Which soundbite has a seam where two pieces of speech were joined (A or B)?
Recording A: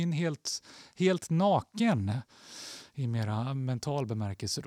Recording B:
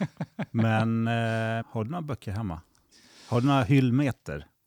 B